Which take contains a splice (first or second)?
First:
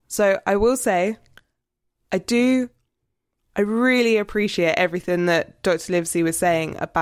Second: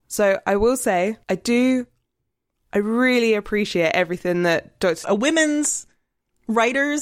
second